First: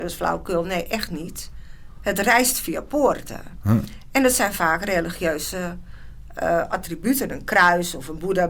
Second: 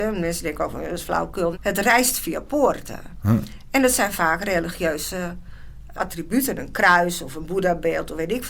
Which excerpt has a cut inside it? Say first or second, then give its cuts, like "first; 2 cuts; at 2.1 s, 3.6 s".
second; 2 cuts; at 1.5 s, 6.0 s